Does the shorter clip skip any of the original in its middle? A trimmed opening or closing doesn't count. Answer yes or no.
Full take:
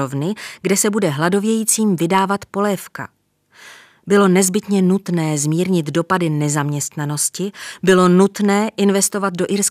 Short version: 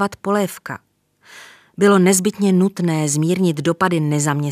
no